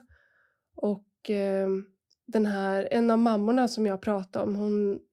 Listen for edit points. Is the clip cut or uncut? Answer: uncut